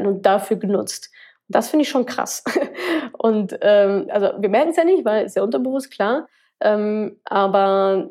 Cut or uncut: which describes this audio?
cut